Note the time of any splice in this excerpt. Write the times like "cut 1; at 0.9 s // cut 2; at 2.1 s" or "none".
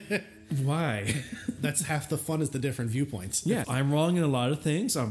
cut 1; at 3.6 s

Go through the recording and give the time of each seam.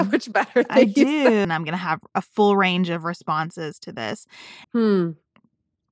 cut 1; at 1.4 s // cut 2; at 4.6 s

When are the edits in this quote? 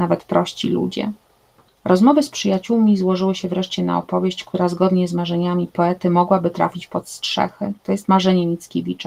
cut 1; at 1.7 s

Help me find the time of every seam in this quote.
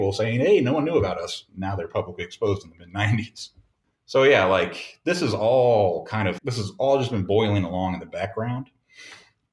cut 1; at 3.8 s // cut 2; at 6.4 s

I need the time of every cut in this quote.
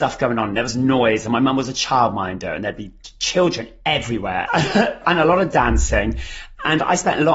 cut 1; at 4.5 s

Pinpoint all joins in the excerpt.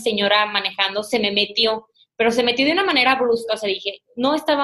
none

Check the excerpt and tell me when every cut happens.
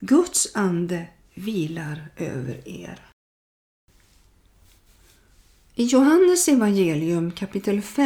none

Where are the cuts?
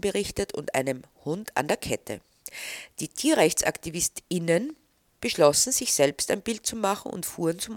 none

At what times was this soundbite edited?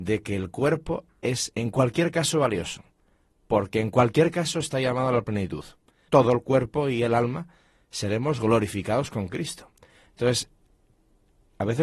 cut 1; at 6.1 s // cut 2; at 10.1 s

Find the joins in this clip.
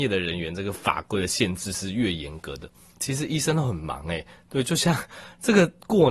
cut 1; at 3.0 s

